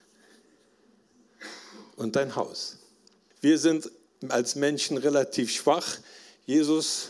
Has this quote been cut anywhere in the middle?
yes; 1 cut; at 3.3 s

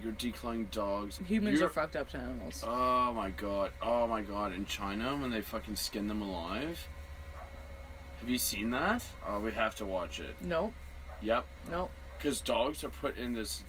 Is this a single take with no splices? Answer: no; 2 cuts; at 1.2 s, 9.2 s

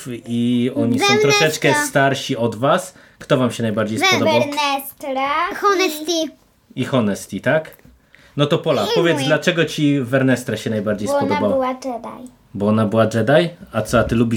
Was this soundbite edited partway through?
no; 0 cuts

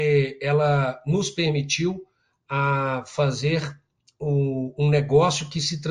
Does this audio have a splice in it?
no; 0 cuts

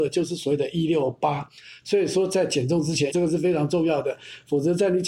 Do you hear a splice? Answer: yes; 2 cuts; at 1.8 s, 3.1 s

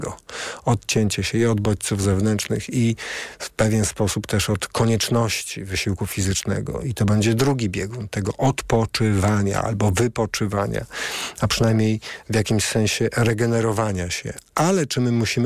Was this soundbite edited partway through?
no; 0 cuts

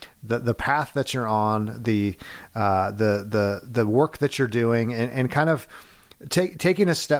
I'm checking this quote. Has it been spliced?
no; 0 cuts

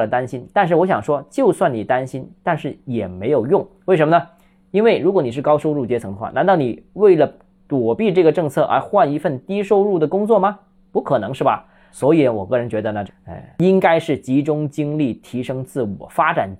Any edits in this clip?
yes; 2 cuts; at 11.9 s, 13.1 s

